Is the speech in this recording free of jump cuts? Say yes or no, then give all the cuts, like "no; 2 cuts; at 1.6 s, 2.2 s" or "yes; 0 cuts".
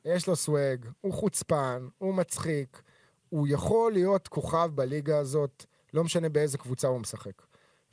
yes; 0 cuts